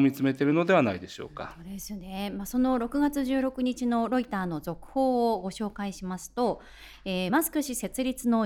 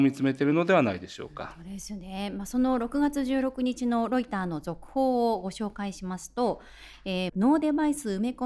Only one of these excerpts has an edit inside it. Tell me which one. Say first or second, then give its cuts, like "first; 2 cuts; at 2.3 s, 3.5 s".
second; 1 cut; at 7.3 s